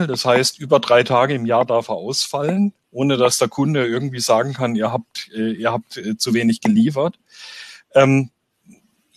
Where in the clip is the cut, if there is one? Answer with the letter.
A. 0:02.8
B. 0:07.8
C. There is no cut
A